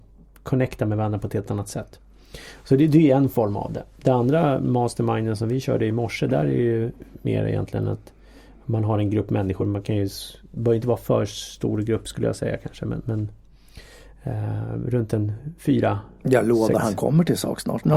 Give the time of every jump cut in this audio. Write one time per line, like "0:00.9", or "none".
none